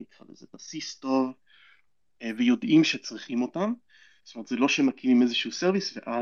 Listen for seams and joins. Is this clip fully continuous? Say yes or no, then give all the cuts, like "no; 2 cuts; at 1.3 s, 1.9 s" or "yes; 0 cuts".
yes; 0 cuts